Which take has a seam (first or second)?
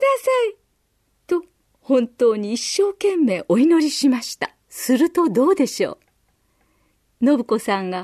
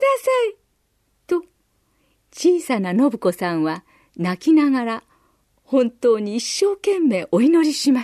first